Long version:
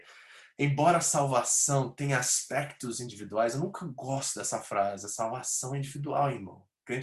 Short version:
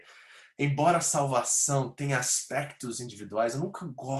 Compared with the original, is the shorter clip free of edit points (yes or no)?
yes